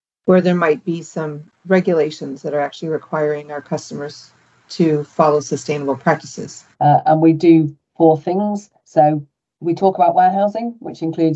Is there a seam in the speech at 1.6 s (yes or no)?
yes